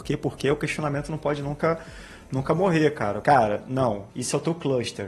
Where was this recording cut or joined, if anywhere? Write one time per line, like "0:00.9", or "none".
0:03.2

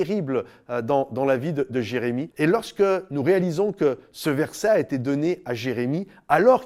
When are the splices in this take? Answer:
0:02.3

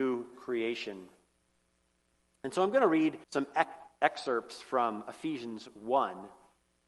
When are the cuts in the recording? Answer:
0:03.2

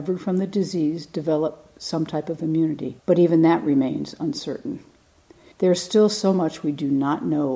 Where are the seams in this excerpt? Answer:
0:03.0
0:05.5

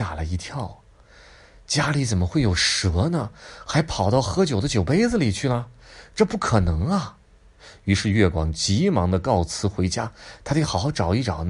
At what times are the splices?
none

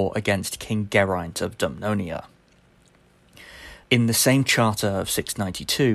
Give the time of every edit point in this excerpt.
0:03.8

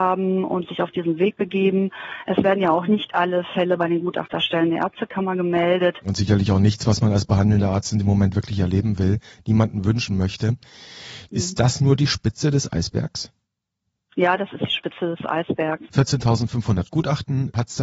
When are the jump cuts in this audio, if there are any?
0:06.0
0:11.3
0:15.9

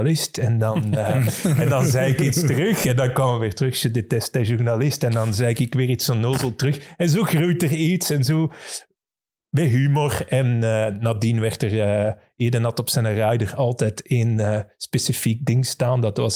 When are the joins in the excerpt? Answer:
none

